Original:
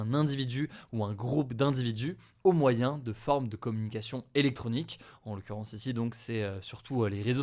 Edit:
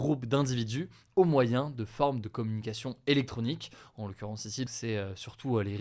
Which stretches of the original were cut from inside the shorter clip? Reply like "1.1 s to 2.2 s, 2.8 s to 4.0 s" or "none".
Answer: 5.9 s to 6.1 s